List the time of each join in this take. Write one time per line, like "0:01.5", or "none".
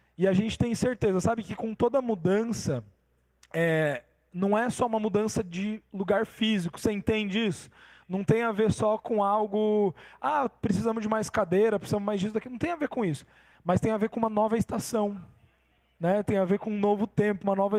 none